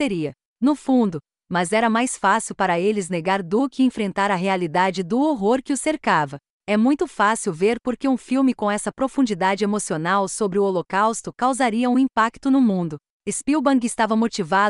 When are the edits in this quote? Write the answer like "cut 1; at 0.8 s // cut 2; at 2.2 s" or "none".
cut 1; at 1.4 s

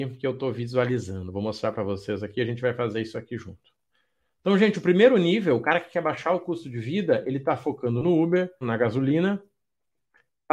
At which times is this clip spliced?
cut 1; at 8.6 s

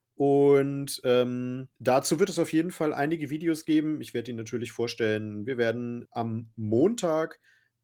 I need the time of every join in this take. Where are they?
cut 1; at 1.7 s // cut 2; at 6.0 s

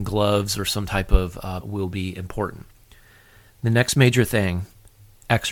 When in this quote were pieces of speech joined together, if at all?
cut 1; at 1.6 s

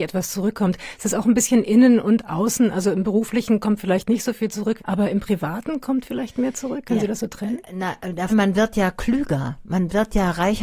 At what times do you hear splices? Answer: cut 1; at 4.8 s // cut 2; at 8.3 s

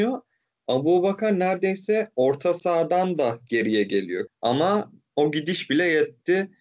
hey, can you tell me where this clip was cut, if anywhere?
cut 1; at 4.3 s

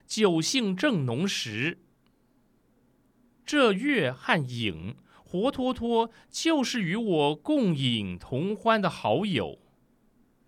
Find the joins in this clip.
none

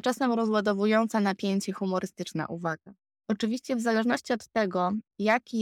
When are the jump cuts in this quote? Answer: cut 1; at 3.2 s

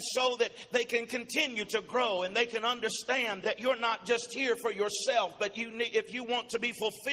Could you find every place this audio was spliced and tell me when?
cut 1; at 3.4 s

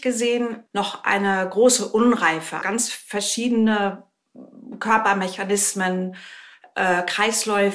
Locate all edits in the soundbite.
cut 1; at 2.6 s

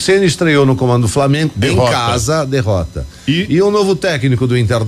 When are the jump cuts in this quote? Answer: none

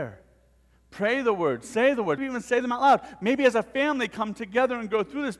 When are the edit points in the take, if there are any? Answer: cut 1; at 2.2 s

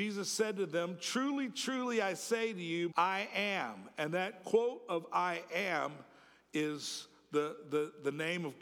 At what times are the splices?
cut 1; at 2.9 s

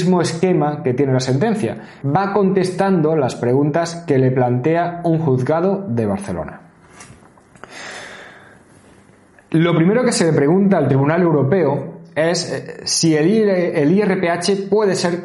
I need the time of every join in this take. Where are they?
cut 1; at 2.0 s

